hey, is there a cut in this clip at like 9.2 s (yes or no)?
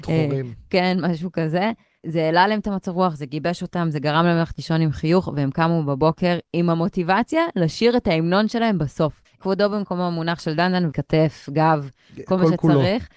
yes